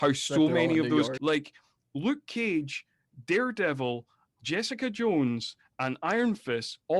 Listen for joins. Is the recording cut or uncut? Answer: cut